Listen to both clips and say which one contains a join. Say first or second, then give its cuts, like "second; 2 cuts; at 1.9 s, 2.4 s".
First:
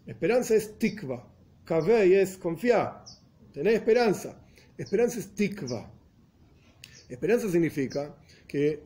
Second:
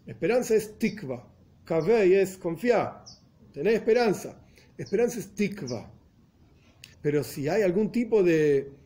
second; 1 cut; at 6.9 s